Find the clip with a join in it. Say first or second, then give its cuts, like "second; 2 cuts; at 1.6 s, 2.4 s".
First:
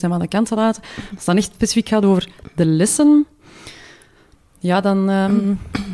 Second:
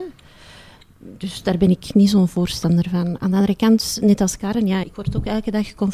second; 1 cut; at 4.8 s